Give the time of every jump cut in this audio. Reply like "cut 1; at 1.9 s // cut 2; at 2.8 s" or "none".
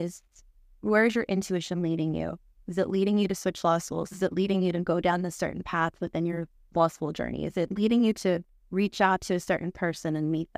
none